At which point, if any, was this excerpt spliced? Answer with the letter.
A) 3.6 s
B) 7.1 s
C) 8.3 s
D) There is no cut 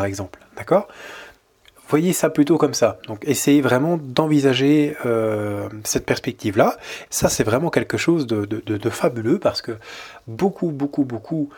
B